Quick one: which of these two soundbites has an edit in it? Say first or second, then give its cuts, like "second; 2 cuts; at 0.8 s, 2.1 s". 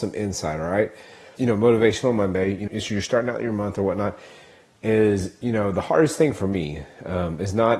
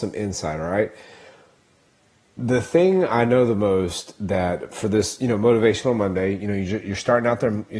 first; 2 cuts; at 1.4 s, 2.7 s